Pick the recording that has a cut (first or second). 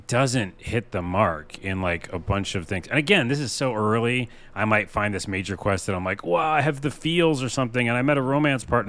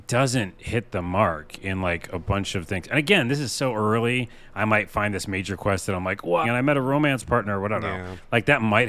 second